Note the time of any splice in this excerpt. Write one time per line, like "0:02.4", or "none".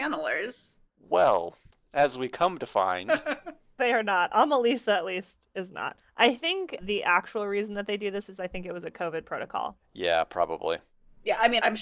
none